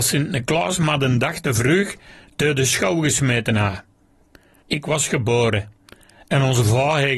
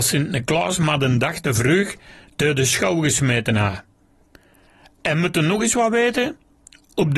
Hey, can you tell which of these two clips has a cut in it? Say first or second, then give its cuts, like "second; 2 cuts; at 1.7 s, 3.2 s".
first; 1 cut; at 4.6 s